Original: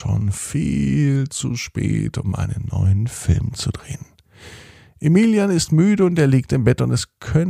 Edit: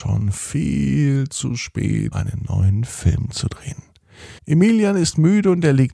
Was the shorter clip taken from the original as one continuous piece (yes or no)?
no